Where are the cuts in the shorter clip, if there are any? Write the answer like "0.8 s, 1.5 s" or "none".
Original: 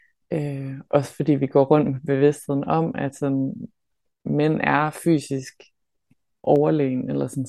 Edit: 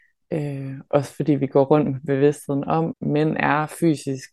2.9 s